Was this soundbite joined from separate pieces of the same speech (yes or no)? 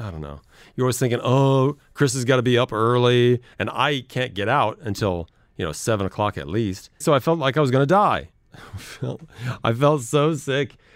yes